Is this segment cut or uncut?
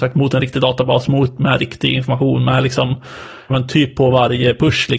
cut